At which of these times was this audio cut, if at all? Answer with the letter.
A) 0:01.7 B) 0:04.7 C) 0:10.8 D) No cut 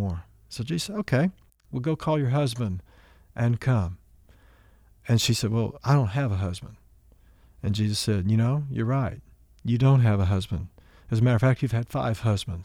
A